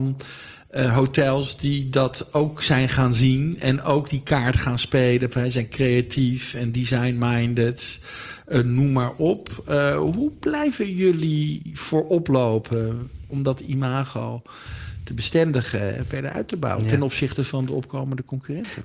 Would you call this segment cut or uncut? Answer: uncut